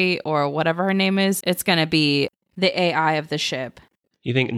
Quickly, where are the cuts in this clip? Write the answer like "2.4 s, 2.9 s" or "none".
1.4 s